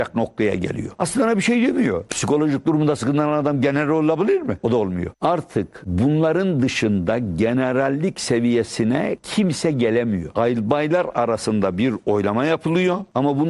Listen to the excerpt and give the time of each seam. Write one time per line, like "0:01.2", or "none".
0:00.9
0:02.1
0:05.1